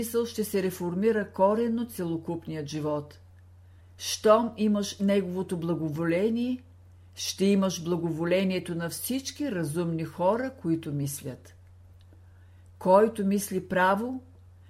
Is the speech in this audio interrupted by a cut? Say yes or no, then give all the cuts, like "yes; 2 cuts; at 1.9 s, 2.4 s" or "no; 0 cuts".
yes; 1 cut; at 3.8 s